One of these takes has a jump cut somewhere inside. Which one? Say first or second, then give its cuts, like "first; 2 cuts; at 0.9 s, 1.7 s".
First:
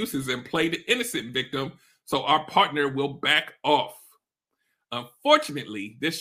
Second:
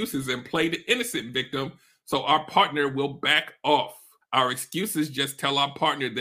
second; 1 cut; at 4.2 s